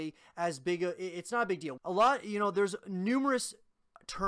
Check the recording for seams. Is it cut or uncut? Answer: cut